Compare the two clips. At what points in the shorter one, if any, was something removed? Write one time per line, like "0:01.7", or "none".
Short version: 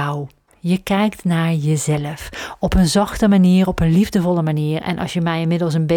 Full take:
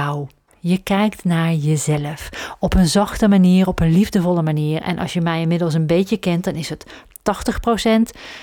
none